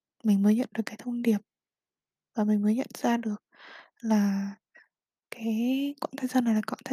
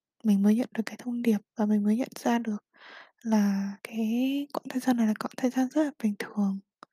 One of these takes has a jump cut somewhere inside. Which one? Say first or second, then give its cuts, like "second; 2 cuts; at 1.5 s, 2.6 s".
second; 2 cuts; at 1.5 s, 3.8 s